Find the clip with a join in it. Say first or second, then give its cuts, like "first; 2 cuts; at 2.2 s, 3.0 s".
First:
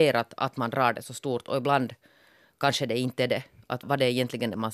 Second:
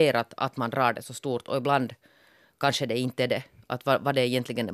first; 1 cut; at 3.8 s